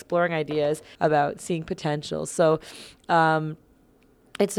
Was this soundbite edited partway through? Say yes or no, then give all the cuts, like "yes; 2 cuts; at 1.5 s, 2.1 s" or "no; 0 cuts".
yes; 1 cut; at 1.0 s